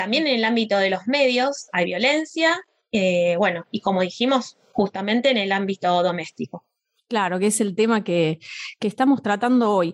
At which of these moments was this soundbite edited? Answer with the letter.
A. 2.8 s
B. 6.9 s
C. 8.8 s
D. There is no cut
D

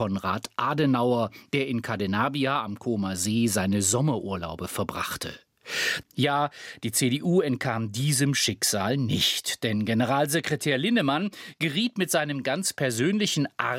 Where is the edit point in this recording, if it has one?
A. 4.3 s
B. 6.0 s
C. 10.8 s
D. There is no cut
B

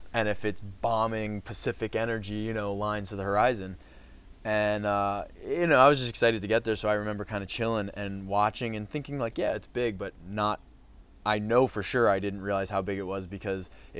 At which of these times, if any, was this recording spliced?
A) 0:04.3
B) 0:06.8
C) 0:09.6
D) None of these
D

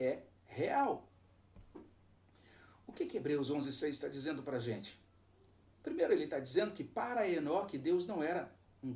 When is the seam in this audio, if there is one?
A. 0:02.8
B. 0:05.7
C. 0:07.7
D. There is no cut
D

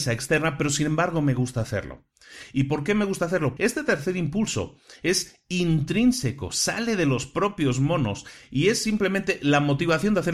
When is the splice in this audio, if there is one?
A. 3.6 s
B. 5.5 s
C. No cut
A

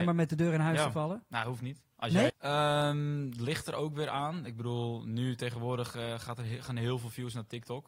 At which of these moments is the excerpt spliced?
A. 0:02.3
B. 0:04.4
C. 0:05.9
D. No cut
A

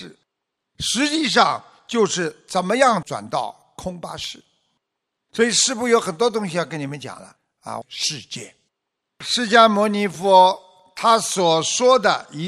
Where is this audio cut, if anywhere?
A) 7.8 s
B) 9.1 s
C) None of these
A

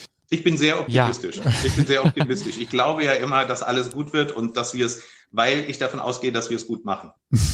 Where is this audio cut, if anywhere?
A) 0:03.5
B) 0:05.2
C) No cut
C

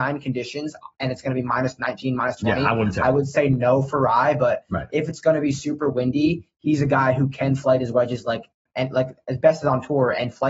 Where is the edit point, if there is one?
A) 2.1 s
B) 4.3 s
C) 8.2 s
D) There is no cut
D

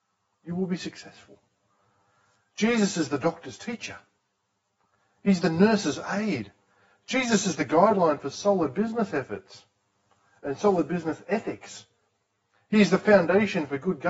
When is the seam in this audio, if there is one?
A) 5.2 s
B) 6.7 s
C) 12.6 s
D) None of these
D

